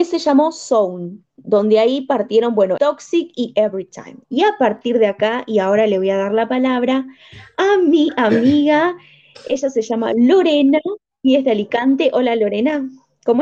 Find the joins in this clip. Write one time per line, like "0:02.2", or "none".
0:02.8
0:04.2